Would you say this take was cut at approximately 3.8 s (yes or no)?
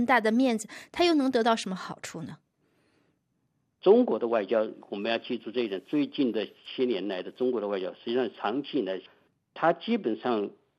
yes